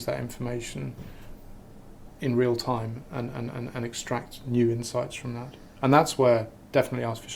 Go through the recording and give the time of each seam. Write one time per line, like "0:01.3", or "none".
none